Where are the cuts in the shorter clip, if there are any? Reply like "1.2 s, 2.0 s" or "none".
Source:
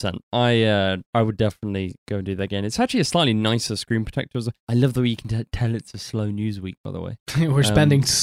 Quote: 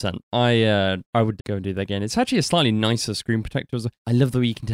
1.4 s